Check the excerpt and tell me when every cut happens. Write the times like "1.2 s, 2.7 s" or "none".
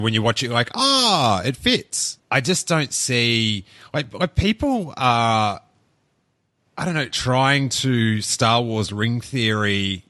2.2 s, 7.1 s